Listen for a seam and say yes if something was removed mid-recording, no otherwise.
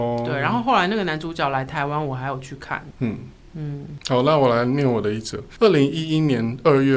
no